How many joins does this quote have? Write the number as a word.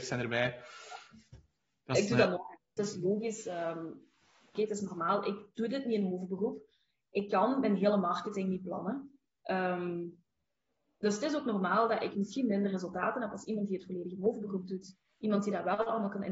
two